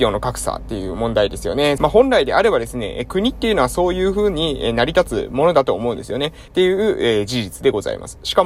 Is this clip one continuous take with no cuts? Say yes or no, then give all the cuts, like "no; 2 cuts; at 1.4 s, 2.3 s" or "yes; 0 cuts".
no; 2 cuts; at 1.8 s, 6.5 s